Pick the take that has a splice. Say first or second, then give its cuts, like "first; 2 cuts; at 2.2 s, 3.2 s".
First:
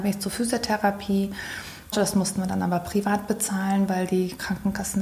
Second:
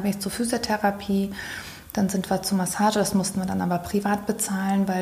first; 1 cut; at 1.9 s